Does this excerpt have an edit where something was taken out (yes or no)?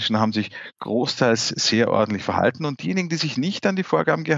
no